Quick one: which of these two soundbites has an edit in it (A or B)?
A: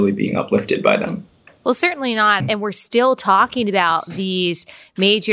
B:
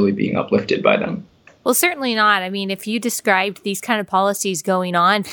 A